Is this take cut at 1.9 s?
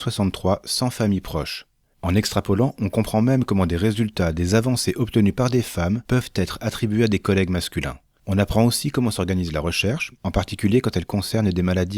yes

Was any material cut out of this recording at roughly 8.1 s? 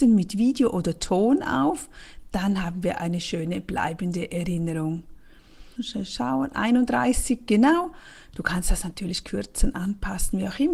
no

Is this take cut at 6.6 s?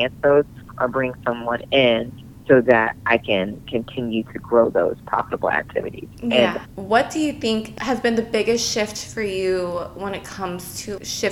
yes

